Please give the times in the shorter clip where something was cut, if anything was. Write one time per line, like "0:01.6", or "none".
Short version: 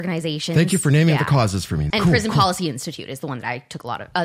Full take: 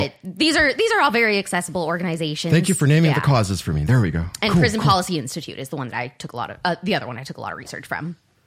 0:01.9